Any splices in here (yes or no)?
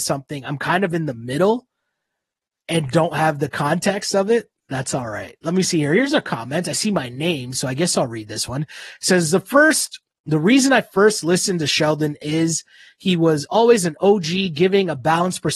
yes